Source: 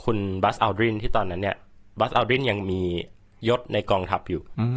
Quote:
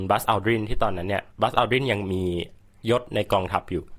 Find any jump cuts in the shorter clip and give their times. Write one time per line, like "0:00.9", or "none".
0:01.3